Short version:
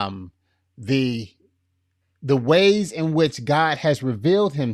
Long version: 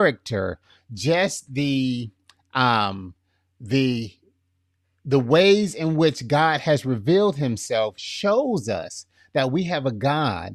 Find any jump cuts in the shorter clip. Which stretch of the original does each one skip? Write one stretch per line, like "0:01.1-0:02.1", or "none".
none